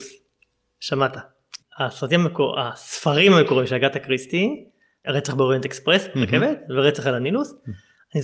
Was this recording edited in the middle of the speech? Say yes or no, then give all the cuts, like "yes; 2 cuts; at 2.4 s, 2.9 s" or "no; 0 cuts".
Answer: yes; 2 cuts; at 1.6 s, 5.0 s